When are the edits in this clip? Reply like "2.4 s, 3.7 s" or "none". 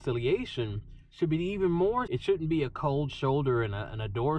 2.1 s